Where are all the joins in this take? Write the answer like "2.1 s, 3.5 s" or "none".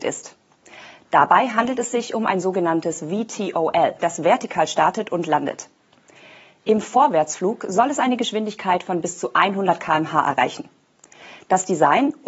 4.0 s

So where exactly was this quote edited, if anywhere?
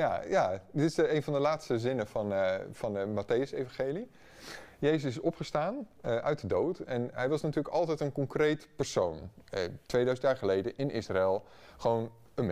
none

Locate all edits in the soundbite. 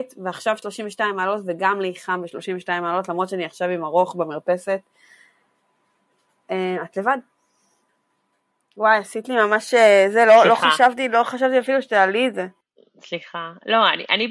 none

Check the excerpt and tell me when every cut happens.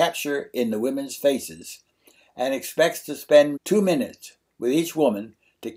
3.6 s

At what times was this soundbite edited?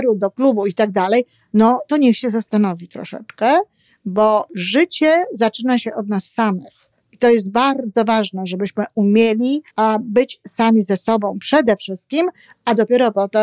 7.0 s, 9.7 s

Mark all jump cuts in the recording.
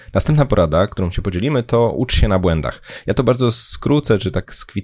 3.0 s

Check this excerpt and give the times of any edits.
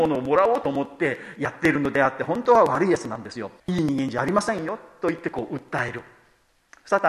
3.6 s

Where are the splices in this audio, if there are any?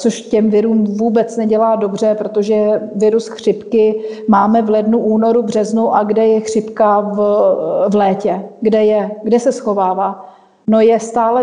none

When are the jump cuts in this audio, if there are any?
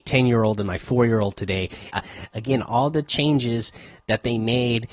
1.9 s

